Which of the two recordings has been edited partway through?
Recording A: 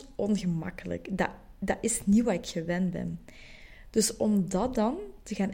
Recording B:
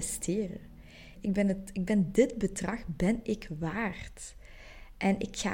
B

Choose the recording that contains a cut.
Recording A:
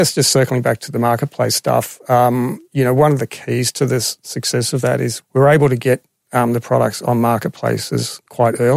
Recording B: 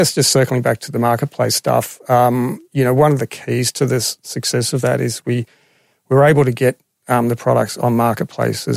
A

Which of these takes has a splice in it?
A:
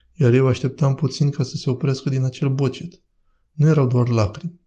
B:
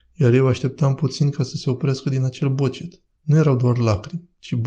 B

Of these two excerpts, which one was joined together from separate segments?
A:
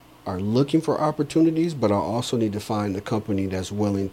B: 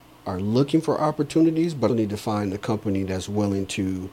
B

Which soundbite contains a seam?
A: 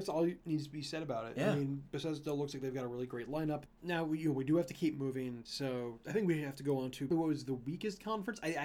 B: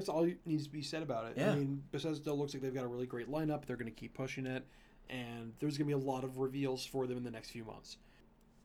A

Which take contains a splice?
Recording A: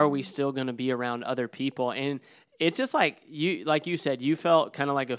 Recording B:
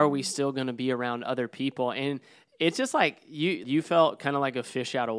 B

